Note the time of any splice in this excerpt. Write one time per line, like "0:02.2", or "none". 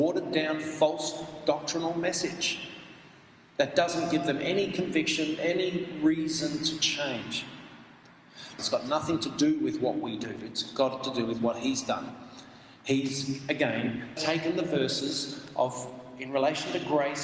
0:08.6
0:14.2